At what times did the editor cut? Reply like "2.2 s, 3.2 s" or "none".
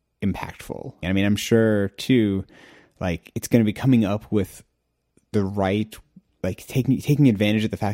1.0 s